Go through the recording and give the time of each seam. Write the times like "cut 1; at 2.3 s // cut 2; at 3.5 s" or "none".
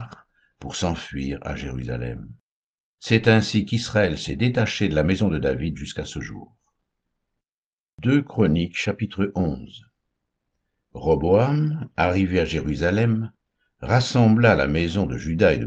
none